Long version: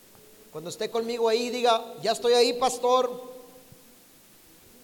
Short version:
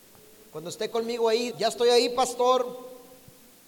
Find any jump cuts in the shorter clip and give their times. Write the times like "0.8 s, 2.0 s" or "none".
1.5 s